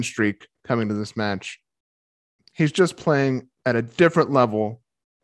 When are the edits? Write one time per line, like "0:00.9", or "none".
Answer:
0:02.4
0:03.6